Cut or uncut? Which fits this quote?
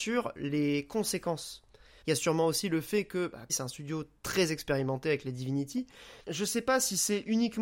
cut